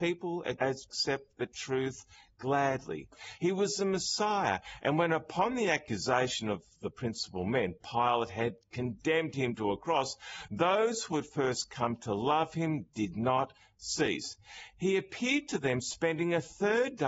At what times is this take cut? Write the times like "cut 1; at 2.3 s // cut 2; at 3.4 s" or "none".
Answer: cut 1; at 3.4 s